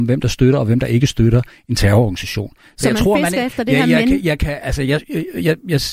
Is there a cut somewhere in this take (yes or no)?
no